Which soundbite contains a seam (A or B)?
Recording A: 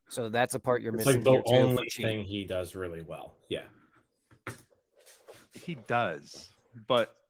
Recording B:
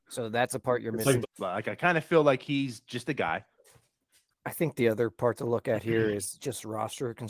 B